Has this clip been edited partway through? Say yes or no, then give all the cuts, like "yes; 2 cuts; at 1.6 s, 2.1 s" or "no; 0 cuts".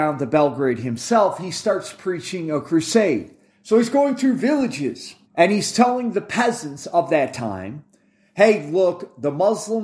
yes; 2 cuts; at 3.5 s, 5.2 s